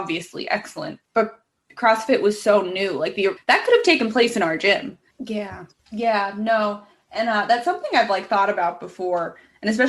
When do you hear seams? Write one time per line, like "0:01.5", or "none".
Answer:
0:03.4
0:05.1